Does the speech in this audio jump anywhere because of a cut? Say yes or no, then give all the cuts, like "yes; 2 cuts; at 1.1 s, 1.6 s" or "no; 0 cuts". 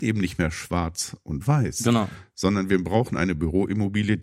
no; 0 cuts